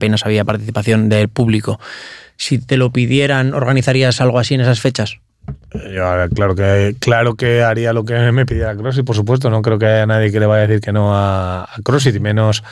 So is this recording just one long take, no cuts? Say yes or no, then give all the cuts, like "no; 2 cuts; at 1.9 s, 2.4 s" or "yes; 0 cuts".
yes; 0 cuts